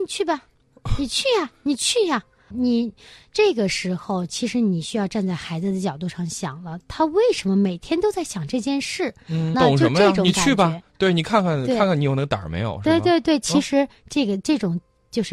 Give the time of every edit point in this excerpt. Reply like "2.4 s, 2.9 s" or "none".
2.5 s, 9.5 s